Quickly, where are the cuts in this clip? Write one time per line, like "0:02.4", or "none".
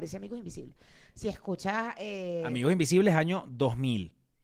none